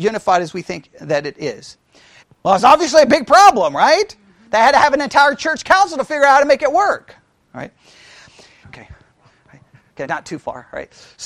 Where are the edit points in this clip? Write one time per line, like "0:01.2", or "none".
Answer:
0:02.2
0:08.6
0:10.1